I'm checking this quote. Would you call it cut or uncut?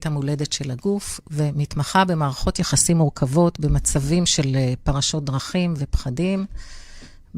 uncut